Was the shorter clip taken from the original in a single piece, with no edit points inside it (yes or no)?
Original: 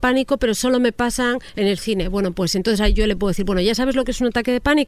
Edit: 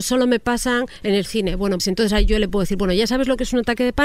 no